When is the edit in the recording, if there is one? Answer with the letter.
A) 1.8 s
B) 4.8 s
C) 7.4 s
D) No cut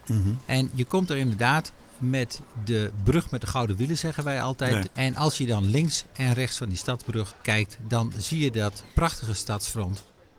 B